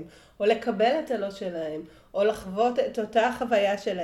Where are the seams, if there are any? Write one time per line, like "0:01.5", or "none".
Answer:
none